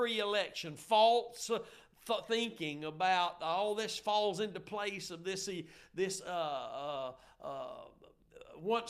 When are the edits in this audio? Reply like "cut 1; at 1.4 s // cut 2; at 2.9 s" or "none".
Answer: none